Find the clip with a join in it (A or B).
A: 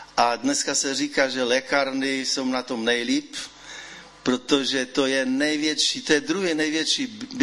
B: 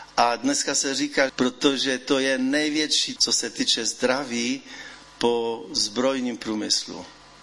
B